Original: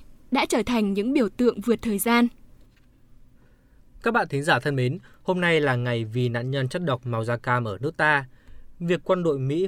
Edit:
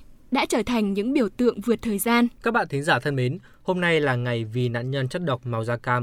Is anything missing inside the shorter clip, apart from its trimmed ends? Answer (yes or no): yes